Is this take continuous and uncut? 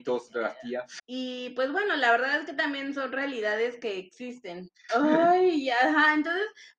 no; 2 cuts; at 1.0 s, 4.9 s

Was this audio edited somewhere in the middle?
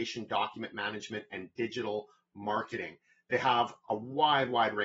no; 0 cuts

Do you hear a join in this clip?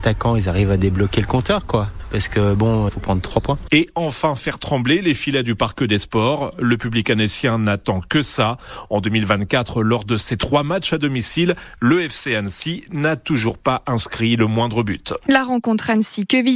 no; 0 cuts

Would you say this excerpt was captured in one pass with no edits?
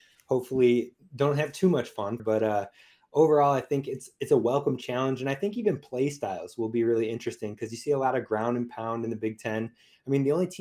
no; 1 cut; at 2.2 s

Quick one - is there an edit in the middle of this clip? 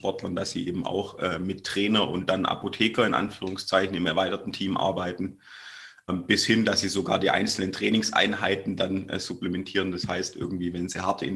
yes; 1 cut; at 6.1 s

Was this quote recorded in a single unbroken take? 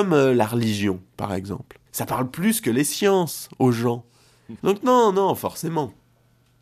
no; 2 cuts; at 1.9 s, 4.6 s

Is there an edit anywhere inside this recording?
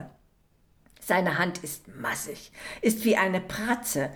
no; 0 cuts

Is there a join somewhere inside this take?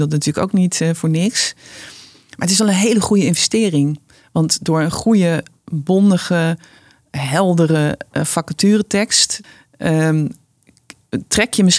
no; 0 cuts

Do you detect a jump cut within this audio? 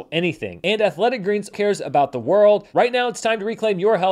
yes; 2 cuts; at 1.5 s, 2.7 s

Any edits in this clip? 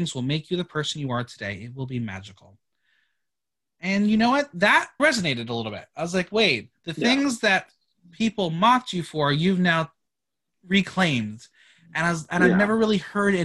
yes; 1 cut; at 5.0 s

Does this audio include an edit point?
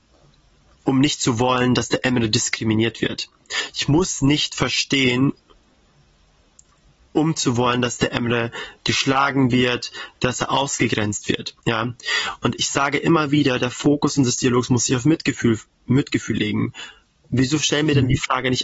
no; 0 cuts

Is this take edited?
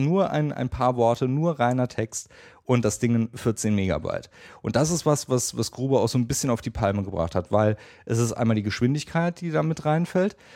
no; 0 cuts

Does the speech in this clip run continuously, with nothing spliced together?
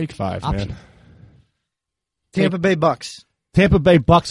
yes; 0 cuts

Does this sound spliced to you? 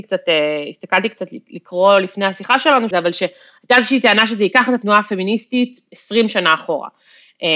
yes; 1 cut; at 2.9 s

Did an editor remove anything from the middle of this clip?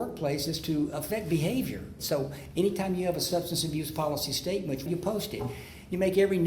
yes; 2 cuts; at 2.0 s, 4.9 s

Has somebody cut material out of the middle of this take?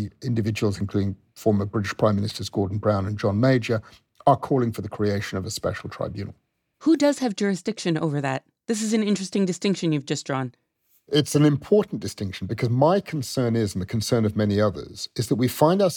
no; 0 cuts

